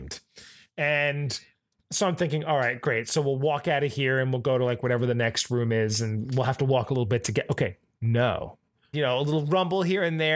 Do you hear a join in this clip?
yes; 1 cut; at 8.9 s

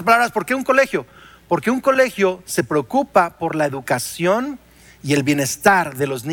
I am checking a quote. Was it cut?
no; 0 cuts

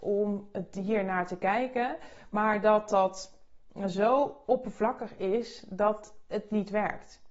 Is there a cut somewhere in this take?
no; 0 cuts

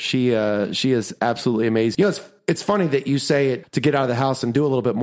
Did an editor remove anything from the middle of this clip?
yes; 2 cuts; at 1.9 s, 3.6 s

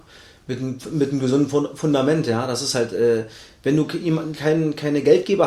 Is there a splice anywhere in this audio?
no; 0 cuts

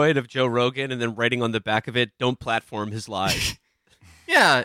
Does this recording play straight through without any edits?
yes; 0 cuts

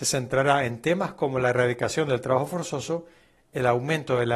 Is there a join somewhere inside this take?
no; 0 cuts

